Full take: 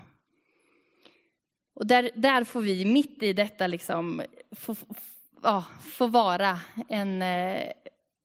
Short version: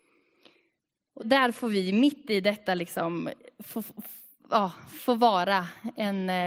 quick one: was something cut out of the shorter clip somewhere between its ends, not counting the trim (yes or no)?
yes